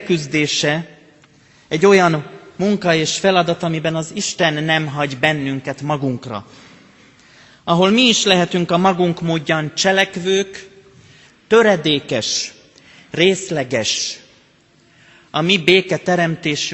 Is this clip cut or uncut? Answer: cut